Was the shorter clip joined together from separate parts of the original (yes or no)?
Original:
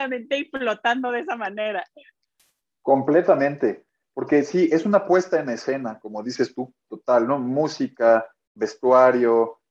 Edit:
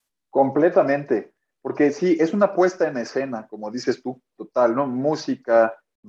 no